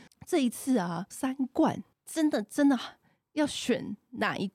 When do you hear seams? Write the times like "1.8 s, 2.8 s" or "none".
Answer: 1.1 s

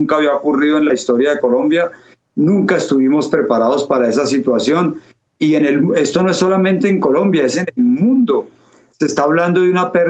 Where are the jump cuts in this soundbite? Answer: none

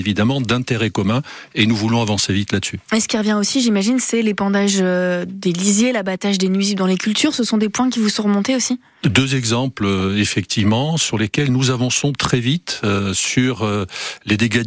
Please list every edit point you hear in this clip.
none

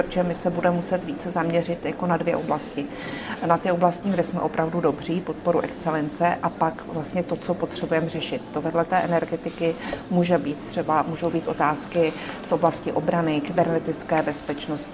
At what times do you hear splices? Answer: 4.0 s

